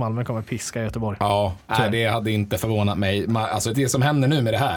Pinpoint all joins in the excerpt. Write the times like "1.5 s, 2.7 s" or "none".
3.7 s